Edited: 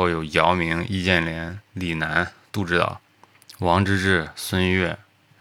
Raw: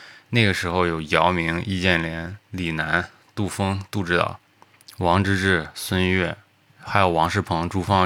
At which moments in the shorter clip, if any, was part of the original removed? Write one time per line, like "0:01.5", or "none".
0:02.5